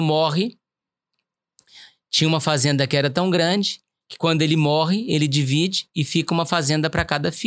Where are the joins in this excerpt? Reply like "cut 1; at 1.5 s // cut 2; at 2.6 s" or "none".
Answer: none